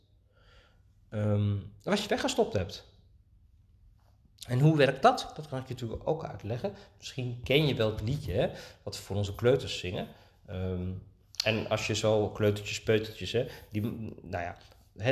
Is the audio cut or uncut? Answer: uncut